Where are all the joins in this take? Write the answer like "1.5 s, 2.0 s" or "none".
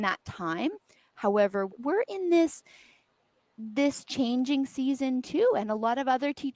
1.7 s